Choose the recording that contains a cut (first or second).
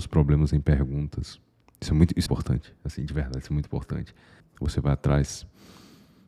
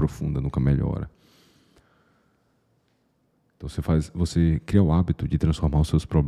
first